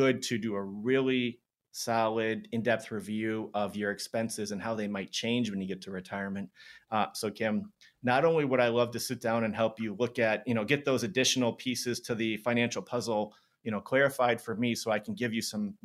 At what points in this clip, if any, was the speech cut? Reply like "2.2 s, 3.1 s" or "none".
none